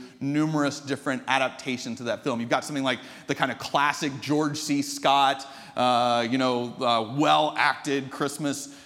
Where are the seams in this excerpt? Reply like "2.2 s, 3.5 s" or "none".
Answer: none